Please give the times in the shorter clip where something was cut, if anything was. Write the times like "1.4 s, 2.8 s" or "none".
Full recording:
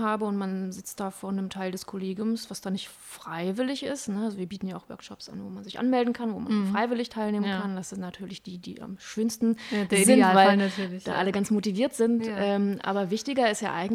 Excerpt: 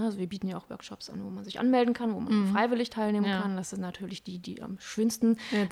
none